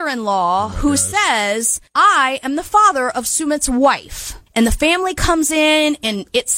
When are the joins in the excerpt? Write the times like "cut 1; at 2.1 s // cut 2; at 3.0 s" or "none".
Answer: none